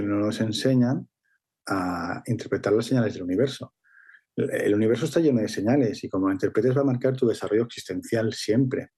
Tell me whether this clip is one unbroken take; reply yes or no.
yes